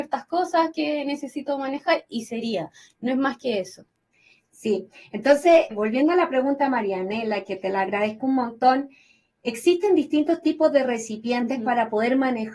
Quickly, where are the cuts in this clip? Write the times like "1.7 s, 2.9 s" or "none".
5.7 s